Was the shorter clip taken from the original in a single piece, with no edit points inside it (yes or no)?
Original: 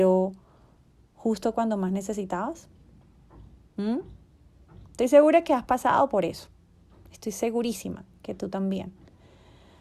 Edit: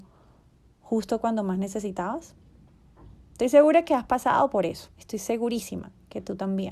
no